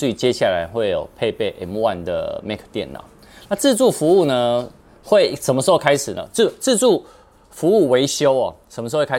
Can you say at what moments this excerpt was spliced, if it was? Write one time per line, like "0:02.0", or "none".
none